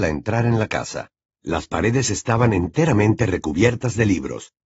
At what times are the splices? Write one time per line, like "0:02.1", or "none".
0:01.3